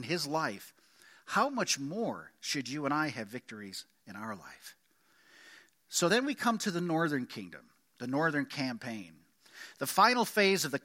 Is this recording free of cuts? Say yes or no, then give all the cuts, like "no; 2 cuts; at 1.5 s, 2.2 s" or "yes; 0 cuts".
yes; 0 cuts